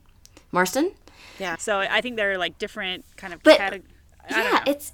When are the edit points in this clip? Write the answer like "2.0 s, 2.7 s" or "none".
1.5 s